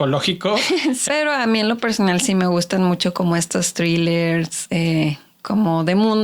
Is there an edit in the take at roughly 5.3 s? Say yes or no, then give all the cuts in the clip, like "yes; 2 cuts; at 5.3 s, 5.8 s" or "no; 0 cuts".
no; 1 cut; at 1.1 s